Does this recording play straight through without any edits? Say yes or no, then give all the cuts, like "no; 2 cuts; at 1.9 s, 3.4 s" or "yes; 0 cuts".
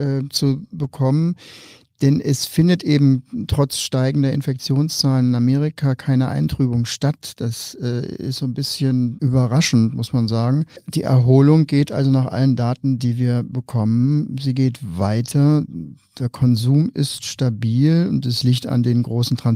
yes; 0 cuts